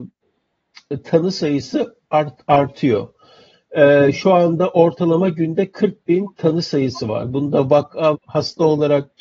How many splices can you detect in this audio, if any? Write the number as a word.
one